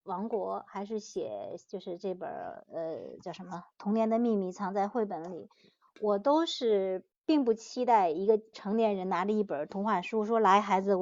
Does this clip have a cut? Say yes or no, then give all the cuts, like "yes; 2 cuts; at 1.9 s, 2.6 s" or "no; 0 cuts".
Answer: no; 0 cuts